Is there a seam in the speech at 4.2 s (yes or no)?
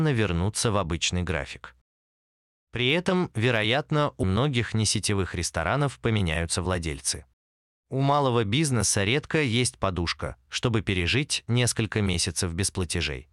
yes